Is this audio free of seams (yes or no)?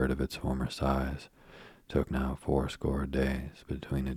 yes